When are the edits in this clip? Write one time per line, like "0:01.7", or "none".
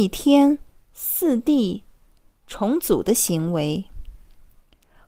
none